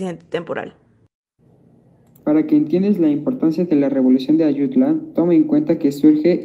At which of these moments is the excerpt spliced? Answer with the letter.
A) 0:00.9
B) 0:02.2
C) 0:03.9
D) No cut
B